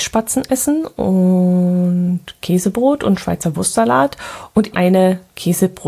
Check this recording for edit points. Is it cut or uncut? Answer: cut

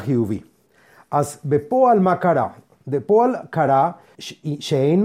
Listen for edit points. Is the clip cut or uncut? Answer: cut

